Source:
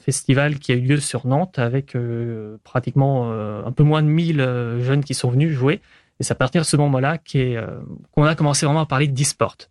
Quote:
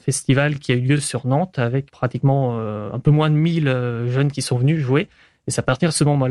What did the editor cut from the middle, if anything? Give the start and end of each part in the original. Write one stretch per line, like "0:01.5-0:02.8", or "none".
0:01.9-0:02.6